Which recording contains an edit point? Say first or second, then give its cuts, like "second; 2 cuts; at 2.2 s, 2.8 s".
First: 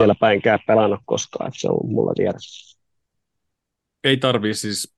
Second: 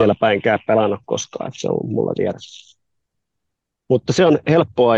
second; 1 cut; at 3.8 s